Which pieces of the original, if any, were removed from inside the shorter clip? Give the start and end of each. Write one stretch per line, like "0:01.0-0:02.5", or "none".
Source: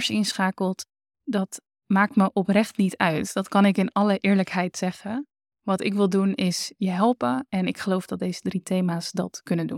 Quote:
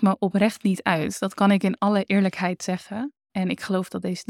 0:05.4-0:07.5